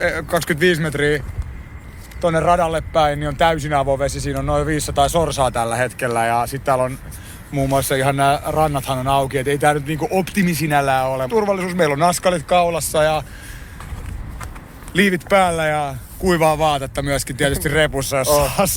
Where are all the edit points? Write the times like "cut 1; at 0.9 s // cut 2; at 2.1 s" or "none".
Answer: cut 1; at 11.3 s